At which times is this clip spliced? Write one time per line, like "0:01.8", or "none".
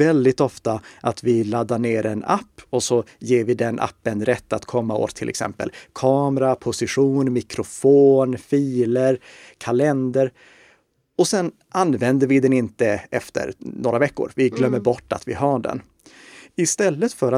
none